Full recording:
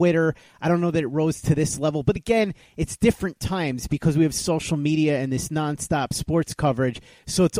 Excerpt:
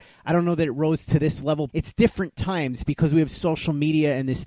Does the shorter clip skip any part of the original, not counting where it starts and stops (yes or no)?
yes